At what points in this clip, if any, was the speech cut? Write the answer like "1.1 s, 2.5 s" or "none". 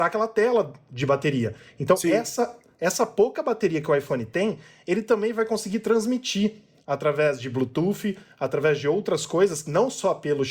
none